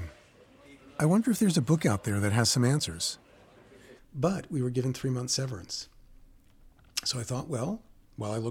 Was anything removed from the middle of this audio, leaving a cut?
yes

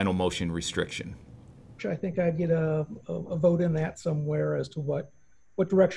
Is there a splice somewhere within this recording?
yes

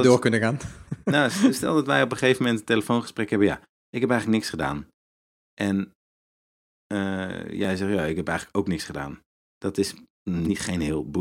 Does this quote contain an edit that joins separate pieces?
no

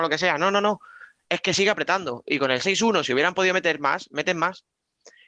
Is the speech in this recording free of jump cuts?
yes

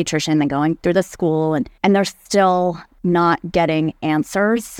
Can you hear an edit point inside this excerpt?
yes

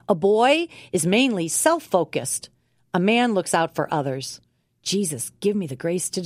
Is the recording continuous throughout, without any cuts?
yes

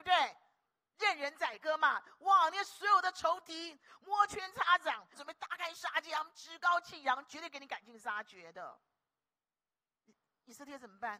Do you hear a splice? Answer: yes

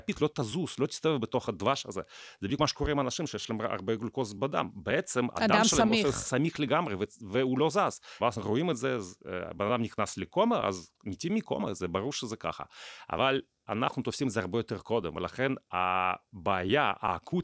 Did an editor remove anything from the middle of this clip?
yes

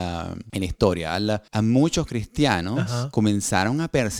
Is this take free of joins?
no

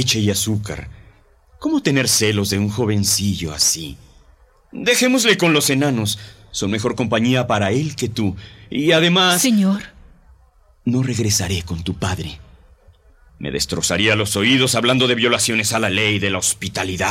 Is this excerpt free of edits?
yes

